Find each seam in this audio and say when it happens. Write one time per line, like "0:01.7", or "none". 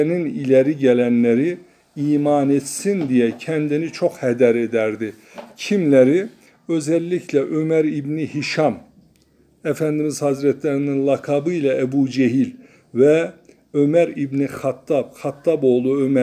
none